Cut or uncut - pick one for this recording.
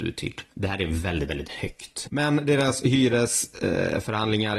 cut